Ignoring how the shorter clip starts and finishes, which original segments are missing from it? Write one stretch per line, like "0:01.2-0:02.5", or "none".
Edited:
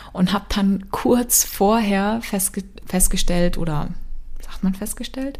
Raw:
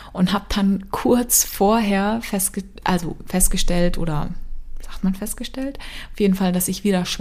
0:02.8-0:03.2